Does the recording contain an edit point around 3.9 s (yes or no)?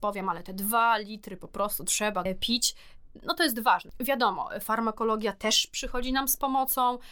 no